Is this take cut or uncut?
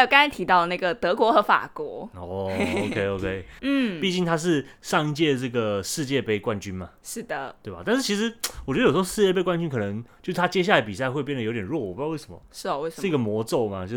cut